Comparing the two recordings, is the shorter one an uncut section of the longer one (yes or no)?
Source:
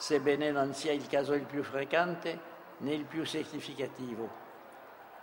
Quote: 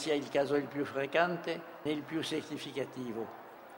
no